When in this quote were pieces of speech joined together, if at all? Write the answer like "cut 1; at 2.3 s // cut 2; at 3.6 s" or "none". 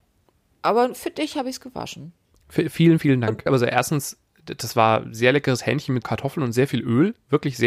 cut 1; at 3.5 s // cut 2; at 6.0 s

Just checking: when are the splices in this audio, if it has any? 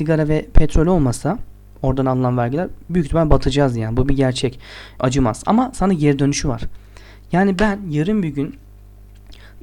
cut 1; at 5.0 s

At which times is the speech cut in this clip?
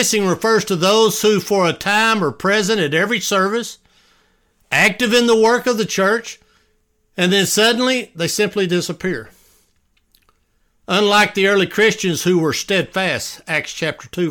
none

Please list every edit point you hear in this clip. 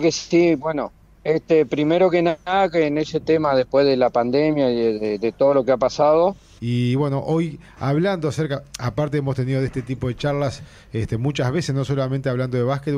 cut 1; at 6.6 s

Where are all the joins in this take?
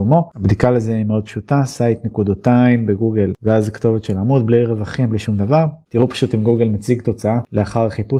none

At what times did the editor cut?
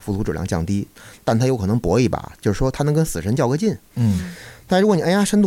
none

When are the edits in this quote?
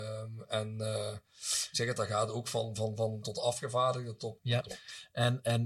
cut 1; at 3.2 s // cut 2; at 4.4 s

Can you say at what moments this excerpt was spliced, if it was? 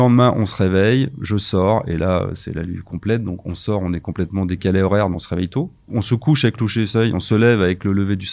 cut 1; at 5.1 s

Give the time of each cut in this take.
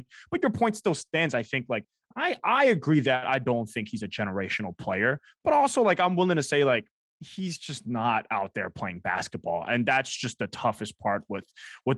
none

